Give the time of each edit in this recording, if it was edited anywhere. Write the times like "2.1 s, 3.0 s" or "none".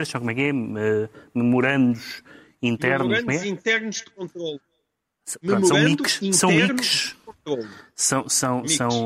none